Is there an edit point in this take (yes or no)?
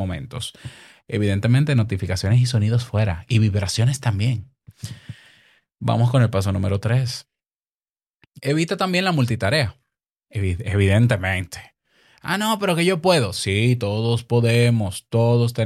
no